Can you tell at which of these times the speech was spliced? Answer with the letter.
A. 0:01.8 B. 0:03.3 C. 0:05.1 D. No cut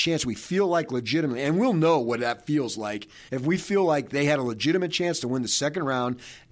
B